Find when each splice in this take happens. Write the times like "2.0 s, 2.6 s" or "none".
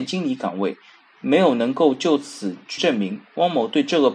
2.8 s

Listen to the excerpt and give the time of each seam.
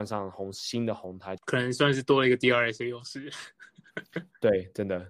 1.4 s

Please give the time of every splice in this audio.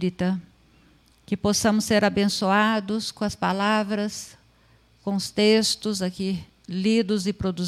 none

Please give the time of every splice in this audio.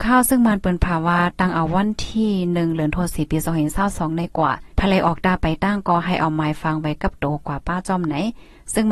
4.7 s

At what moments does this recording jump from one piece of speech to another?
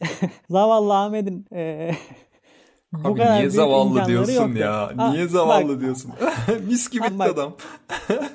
7.1 s

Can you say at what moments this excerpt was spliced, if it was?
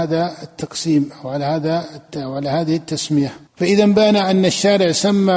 3.5 s

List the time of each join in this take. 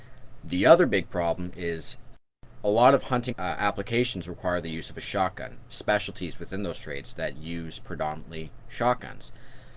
3.3 s, 5.7 s

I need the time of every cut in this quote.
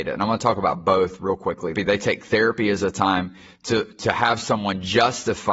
1.8 s

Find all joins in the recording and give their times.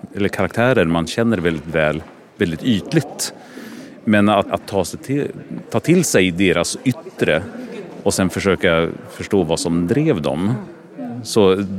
4.5 s

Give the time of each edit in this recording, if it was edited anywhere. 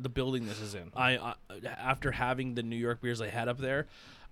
0.9 s

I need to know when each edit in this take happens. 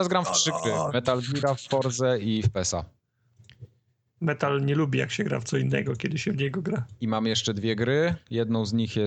none

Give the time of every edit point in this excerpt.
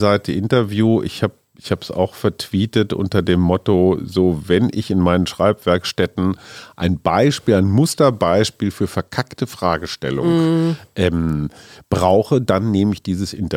none

